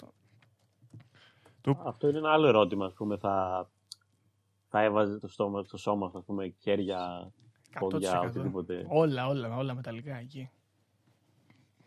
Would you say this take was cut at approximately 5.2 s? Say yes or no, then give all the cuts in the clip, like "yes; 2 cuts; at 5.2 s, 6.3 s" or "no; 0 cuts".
yes; 1 cut; at 5.2 s